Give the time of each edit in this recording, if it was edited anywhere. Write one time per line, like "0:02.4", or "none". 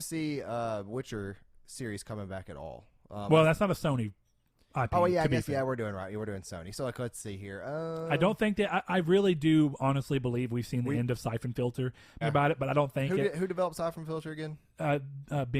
0:12.2